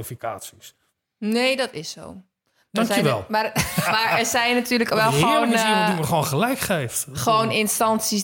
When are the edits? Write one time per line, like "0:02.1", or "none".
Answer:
0:03.8